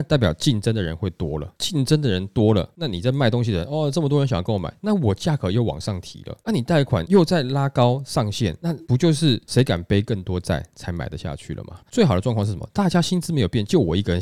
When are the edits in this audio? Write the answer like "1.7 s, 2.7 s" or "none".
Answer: 11.8 s

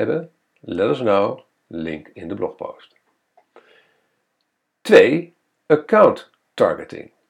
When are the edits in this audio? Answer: none

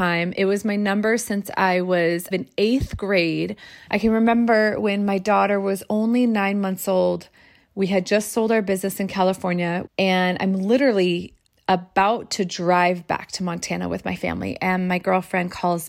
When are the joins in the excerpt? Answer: 2.3 s, 3.9 s

